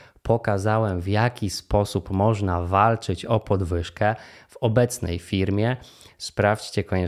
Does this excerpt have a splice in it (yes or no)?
yes